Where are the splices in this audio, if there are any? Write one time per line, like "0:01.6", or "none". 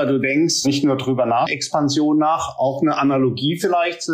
0:01.5